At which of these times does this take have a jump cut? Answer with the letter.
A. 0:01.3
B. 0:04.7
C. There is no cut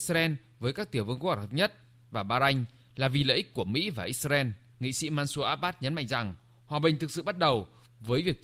B